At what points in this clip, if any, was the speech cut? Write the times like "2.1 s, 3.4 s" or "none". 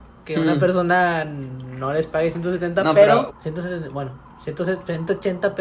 3.3 s